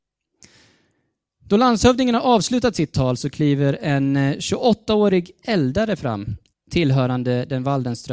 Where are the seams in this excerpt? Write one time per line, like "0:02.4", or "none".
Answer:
0:06.5

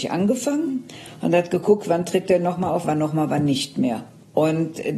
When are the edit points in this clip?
0:02.8

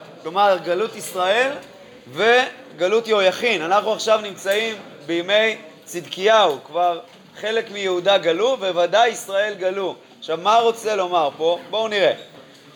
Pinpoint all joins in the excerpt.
none

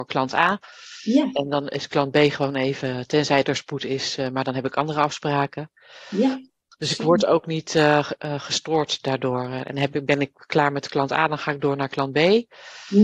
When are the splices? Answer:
none

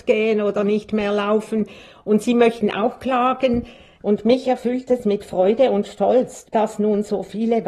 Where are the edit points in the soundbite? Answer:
0:04.0
0:06.4

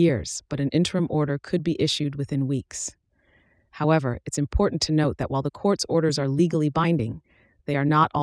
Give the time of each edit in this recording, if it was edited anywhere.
none

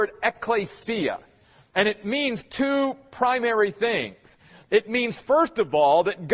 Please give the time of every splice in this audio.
none

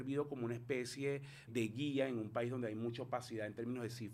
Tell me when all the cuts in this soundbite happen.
0:01.5

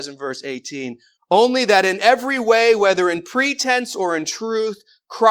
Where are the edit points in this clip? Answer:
0:01.2

